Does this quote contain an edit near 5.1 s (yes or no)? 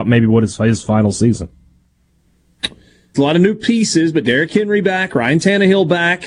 no